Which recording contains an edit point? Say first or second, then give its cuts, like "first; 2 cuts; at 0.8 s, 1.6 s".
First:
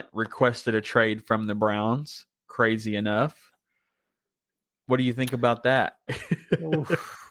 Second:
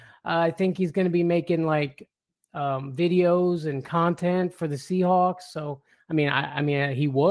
first; 1 cut; at 6.1 s